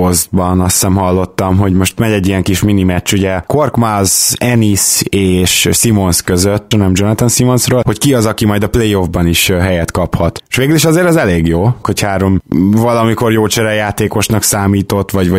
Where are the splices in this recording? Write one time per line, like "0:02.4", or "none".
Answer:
0:06.7
0:11.8